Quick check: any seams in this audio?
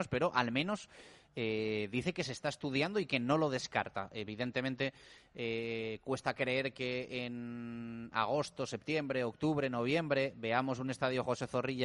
no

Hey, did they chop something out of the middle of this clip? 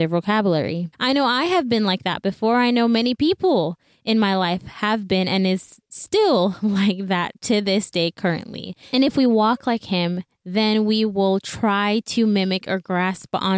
yes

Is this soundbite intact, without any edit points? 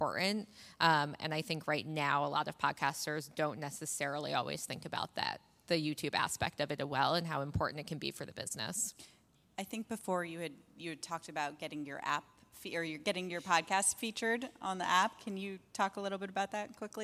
yes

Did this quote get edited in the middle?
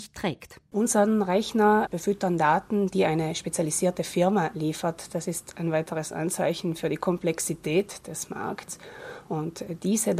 no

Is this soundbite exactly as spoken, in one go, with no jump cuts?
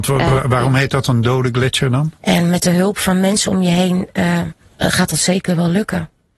no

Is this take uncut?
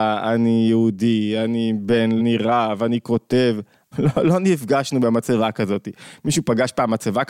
no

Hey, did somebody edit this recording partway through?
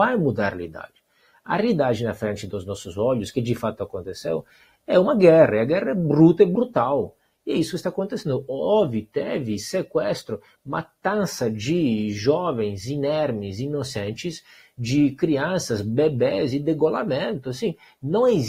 no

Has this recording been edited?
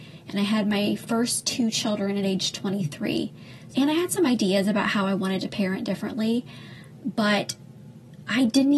yes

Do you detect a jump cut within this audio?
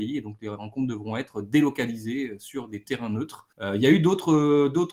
yes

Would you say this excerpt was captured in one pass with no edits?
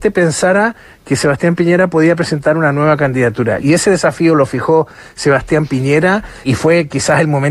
no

